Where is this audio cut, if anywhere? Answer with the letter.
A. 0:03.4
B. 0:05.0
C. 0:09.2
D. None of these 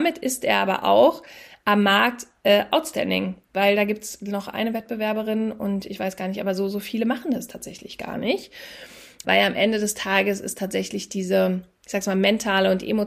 C